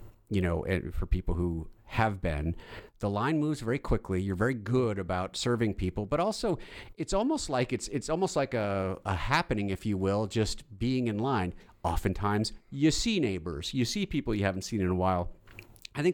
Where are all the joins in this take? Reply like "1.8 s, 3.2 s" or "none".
none